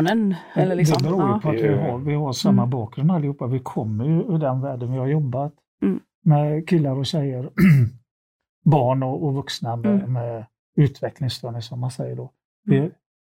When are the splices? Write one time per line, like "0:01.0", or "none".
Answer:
none